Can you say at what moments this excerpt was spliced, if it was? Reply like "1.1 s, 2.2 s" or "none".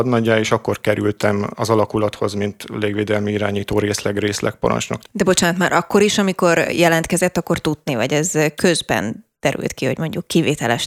5.0 s, 7.9 s